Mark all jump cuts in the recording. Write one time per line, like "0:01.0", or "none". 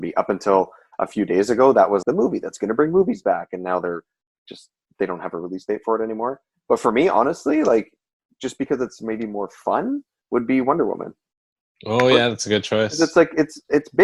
0:02.0